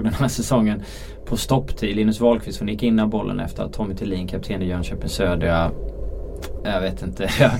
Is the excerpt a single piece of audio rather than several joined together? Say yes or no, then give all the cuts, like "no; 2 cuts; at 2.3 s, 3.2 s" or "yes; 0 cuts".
no; 1 cut; at 6.6 s